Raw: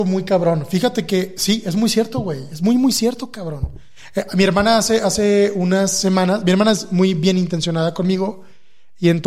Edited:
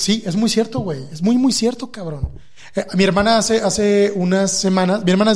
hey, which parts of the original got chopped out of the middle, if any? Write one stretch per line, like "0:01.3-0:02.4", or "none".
none